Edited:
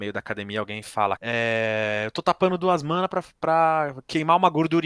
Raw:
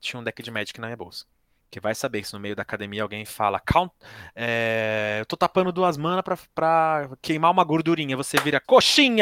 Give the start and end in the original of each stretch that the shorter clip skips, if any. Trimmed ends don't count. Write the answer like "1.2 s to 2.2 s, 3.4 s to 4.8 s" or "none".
3.6 s to 4.3 s